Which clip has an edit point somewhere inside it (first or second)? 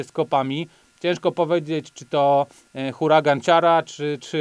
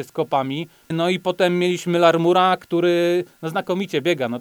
second